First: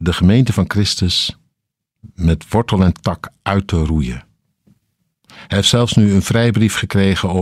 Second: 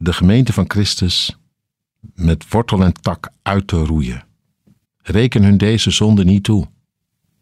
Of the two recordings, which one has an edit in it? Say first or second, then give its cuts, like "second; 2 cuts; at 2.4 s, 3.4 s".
second; 1 cut; at 4.8 s